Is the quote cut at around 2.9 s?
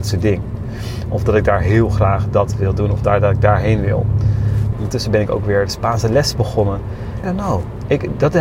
no; 2 cuts; at 4.7 s, 7.2 s

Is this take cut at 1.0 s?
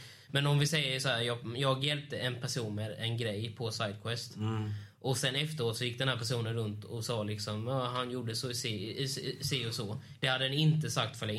yes; 1 cut; at 1.0 s

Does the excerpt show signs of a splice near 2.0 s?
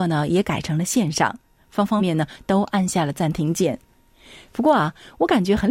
yes; 1 cut; at 2.0 s

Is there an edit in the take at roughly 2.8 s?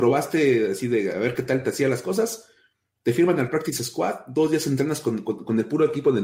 no; 0 cuts

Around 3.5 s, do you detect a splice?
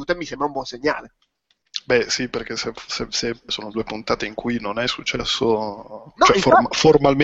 yes; 1 cut; at 3.5 s

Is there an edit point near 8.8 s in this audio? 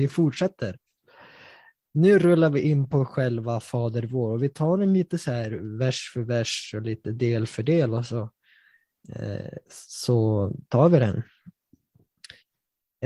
no; 0 cuts

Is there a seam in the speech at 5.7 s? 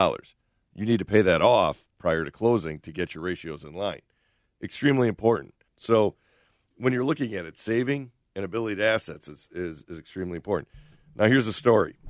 yes; 1 cut; at 5.7 s

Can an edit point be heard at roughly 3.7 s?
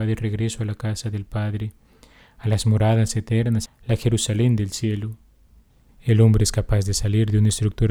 yes; 2 cuts; at 3.7 s, 5.9 s

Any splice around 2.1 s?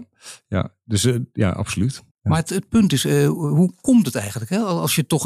yes; 1 cut; at 2.1 s

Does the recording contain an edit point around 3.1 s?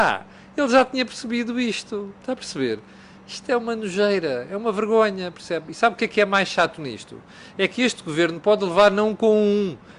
no; 0 cuts

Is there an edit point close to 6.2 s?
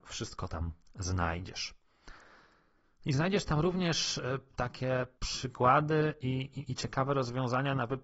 no; 0 cuts

